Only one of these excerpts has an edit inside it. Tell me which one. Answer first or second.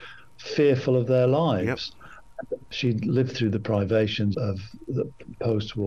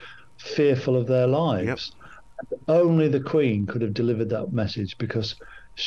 first